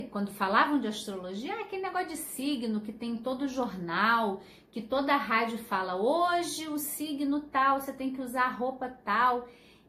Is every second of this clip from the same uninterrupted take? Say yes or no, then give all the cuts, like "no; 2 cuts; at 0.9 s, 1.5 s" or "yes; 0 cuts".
yes; 0 cuts